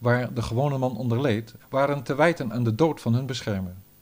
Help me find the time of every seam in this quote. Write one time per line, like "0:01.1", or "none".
0:01.6